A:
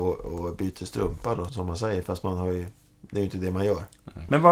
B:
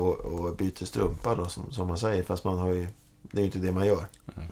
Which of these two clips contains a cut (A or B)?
A